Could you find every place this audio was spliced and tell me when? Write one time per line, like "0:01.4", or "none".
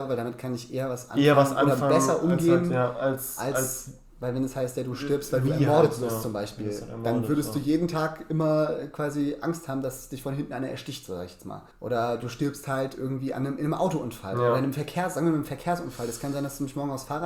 0:11.7

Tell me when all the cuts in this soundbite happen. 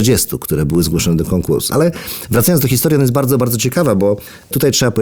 0:01.7

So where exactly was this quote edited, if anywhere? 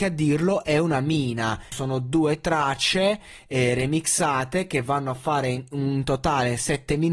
0:01.7

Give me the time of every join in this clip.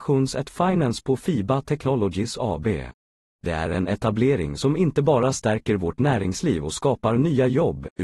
0:03.3

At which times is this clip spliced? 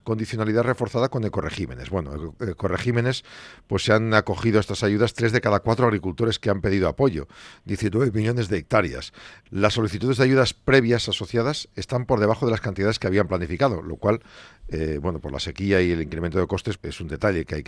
0:09.5
0:16.8

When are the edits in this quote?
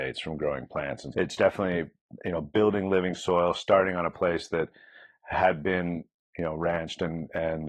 0:01.1

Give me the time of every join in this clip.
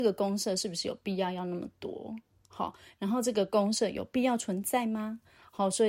none

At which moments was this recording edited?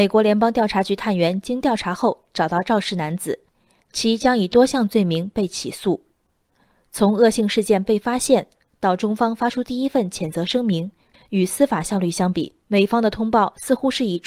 0:11.1
0:12.6

